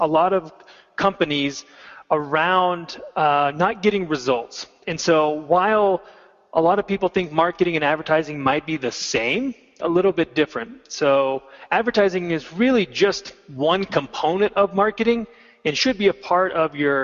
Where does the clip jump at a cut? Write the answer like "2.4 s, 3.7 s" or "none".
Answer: 4.8 s, 9.8 s